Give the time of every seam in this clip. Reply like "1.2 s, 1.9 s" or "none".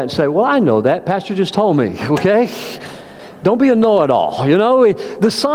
none